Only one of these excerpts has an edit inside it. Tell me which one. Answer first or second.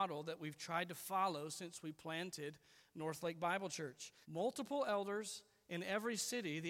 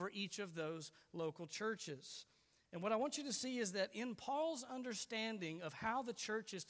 first